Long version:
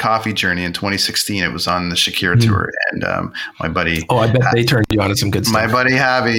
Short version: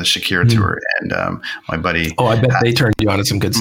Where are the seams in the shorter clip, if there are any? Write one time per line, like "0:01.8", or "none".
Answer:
none